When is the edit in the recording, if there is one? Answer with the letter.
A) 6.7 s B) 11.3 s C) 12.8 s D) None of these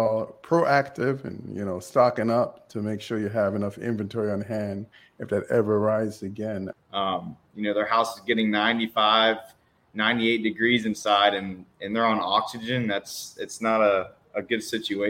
A